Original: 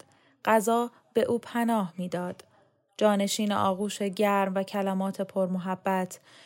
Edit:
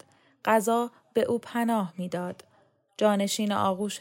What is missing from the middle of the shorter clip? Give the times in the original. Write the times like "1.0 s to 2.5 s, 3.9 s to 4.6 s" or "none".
none